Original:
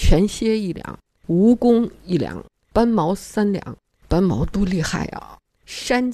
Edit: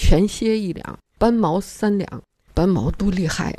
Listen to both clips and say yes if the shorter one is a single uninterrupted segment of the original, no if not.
no